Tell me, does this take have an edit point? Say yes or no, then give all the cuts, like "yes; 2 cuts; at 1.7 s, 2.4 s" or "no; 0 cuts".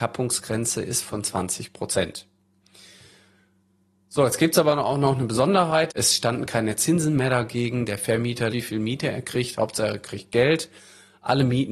yes; 2 cuts; at 5.9 s, 8.5 s